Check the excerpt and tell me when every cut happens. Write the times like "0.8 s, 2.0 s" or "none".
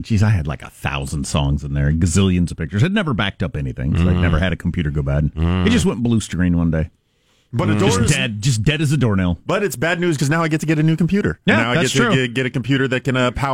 10.2 s

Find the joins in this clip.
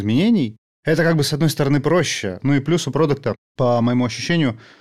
2.4 s

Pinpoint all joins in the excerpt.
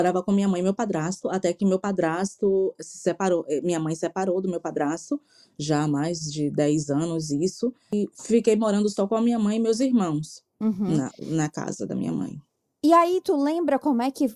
none

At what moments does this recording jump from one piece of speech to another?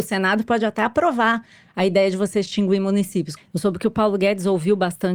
3.4 s

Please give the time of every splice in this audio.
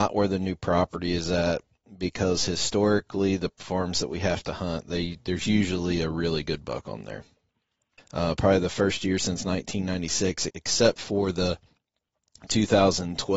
8.0 s, 10.5 s

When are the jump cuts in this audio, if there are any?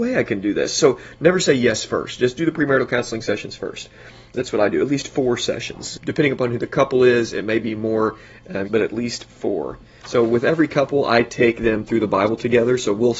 8.6 s, 10.0 s

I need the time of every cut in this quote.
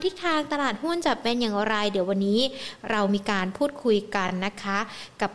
none

